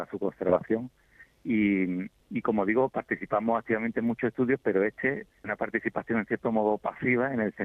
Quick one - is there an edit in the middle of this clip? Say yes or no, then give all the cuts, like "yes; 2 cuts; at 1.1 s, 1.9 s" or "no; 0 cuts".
yes; 2 cuts; at 2.2 s, 5.4 s